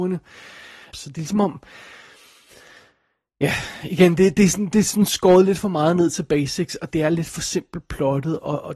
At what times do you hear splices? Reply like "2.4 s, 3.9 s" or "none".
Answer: 0.9 s, 6.9 s